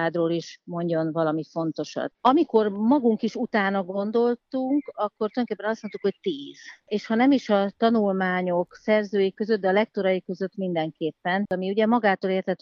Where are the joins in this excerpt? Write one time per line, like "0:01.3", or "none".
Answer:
0:02.1
0:11.4